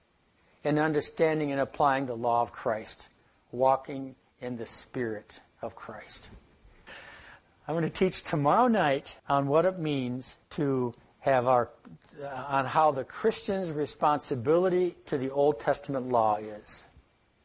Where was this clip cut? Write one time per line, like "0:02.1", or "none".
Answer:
0:06.9
0:09.2
0:10.4